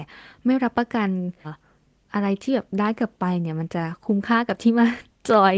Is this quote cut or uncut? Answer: cut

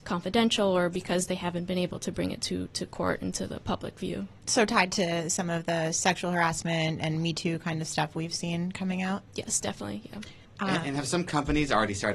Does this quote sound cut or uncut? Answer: uncut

